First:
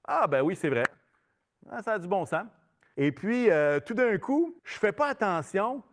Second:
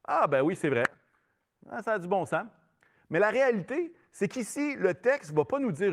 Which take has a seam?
first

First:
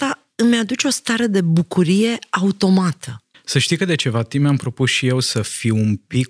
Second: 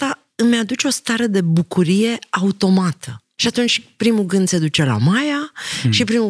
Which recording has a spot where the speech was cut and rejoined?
first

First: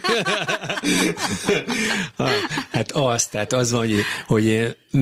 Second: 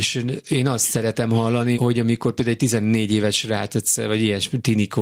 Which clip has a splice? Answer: second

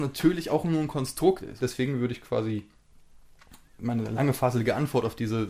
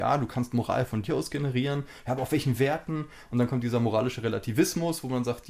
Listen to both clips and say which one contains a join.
first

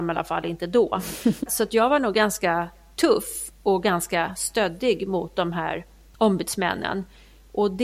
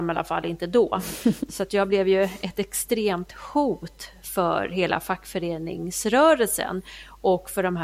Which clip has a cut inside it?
first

